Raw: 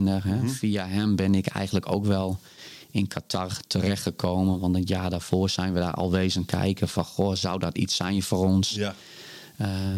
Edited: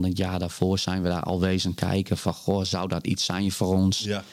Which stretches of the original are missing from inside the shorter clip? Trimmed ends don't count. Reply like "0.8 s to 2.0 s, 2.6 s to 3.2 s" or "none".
none